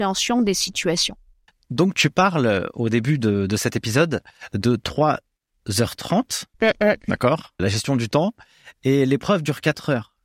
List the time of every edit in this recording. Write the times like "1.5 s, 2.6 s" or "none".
1.5 s, 7.6 s